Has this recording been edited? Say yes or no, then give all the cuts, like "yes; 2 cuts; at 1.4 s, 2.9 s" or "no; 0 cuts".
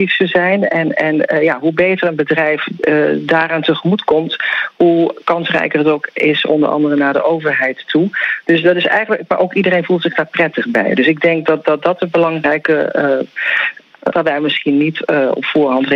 yes; 1 cut; at 14.1 s